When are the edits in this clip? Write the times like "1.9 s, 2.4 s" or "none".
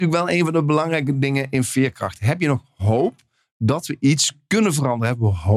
none